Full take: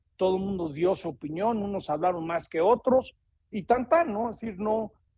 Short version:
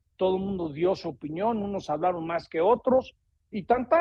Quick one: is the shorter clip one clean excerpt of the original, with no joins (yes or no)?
yes